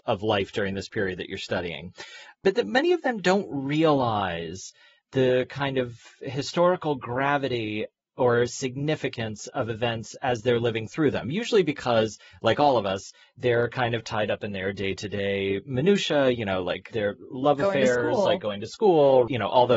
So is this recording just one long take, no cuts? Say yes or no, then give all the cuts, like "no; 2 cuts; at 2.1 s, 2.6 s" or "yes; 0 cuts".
yes; 0 cuts